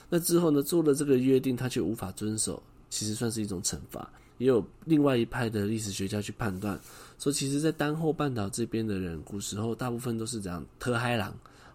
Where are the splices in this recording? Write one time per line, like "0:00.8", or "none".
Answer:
0:04.3